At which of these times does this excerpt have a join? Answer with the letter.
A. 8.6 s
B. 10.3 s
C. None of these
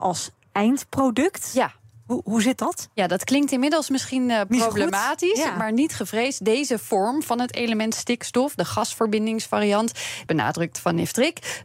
B